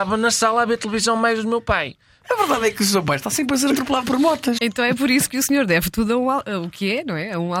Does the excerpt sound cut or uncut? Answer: cut